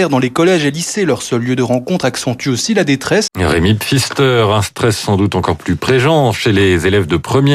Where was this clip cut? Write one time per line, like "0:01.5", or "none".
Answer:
0:03.3